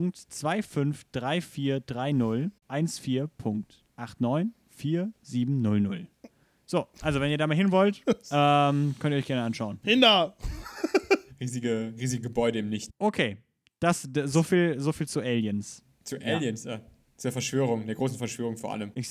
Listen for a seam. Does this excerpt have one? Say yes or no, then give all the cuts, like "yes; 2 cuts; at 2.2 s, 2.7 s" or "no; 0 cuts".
yes; 1 cut; at 9.8 s